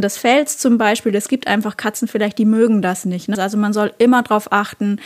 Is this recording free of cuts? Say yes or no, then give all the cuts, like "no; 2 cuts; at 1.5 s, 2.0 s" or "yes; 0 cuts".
no; 1 cut; at 3.3 s